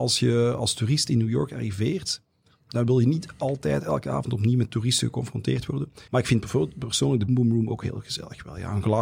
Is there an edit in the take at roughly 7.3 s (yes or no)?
yes